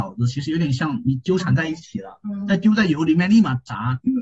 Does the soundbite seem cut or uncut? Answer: uncut